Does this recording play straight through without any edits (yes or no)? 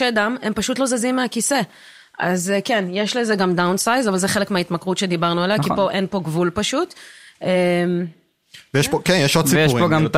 yes